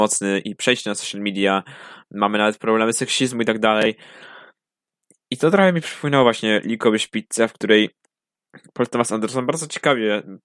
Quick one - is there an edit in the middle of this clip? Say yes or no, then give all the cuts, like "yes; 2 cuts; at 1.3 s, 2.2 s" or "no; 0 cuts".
no; 0 cuts